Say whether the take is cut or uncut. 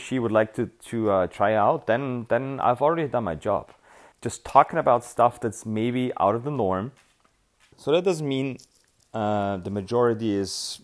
cut